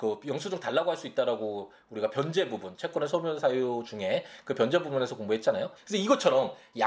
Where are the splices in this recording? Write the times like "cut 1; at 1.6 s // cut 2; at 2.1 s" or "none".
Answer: cut 1; at 5.8 s